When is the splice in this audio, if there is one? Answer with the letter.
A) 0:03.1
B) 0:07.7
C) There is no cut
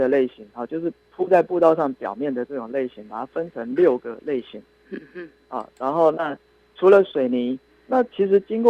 B